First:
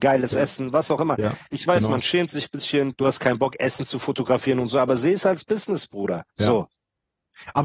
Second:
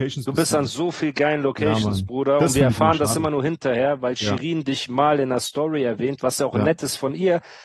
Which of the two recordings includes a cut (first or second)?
first